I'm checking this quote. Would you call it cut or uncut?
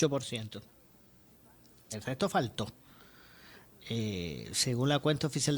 cut